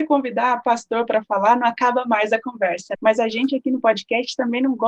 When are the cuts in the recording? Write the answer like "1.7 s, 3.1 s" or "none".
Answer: none